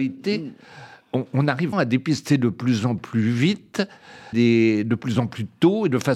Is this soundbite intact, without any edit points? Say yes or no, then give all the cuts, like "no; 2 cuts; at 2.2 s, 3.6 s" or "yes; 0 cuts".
no; 2 cuts; at 1.7 s, 4.3 s